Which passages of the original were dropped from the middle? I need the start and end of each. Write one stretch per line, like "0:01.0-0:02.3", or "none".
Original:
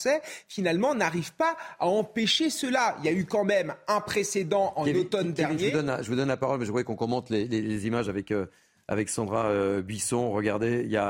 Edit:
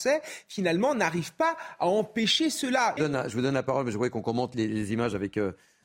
0:03.0-0:05.7
0:07.3-0:07.5